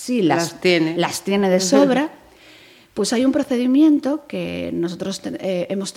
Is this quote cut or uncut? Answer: uncut